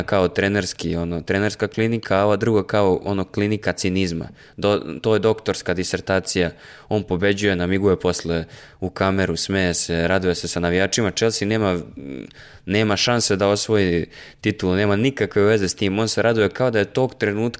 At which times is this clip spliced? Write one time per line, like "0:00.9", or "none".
none